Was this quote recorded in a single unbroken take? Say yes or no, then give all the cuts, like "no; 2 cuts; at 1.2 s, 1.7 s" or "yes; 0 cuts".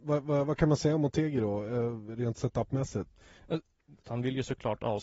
no; 1 cut; at 4.0 s